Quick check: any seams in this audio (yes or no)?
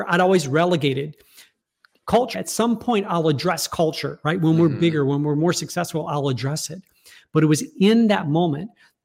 yes